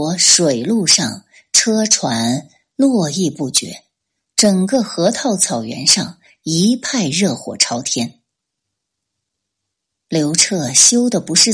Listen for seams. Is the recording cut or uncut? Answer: cut